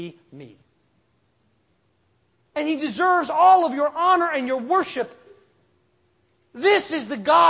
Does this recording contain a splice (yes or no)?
yes